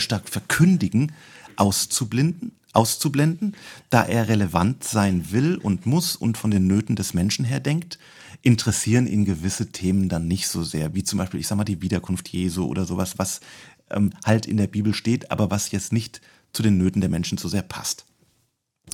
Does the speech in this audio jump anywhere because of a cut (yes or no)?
no